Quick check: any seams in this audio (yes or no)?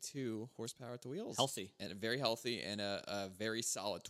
no